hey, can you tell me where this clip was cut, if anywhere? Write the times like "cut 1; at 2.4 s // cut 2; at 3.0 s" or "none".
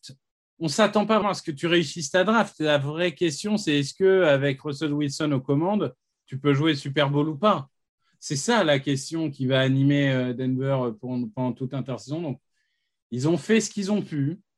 cut 1; at 1.2 s